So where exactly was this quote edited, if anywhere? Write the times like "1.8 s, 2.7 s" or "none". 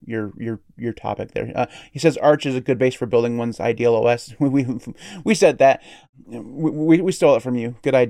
none